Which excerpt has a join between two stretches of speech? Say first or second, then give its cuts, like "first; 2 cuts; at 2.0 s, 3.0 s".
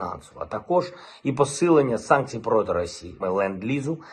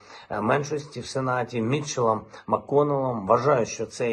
first; 1 cut; at 3.2 s